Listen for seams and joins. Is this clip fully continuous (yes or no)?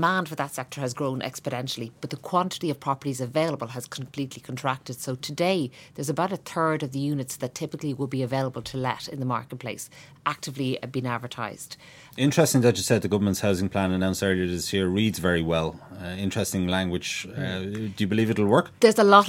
no